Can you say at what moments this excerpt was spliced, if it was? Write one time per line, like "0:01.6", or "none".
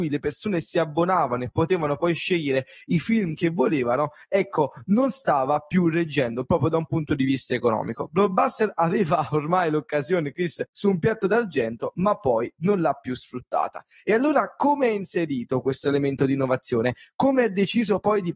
none